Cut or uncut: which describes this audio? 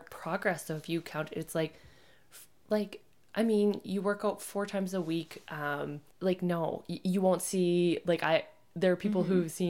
cut